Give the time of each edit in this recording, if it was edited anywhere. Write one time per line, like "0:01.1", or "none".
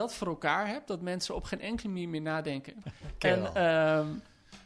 0:02.8